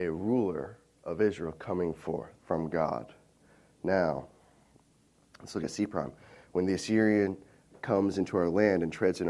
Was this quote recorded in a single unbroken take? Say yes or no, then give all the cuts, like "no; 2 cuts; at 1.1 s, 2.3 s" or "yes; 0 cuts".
no; 1 cut; at 2.4 s